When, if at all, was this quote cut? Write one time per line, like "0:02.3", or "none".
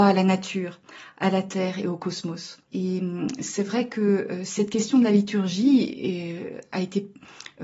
0:02.6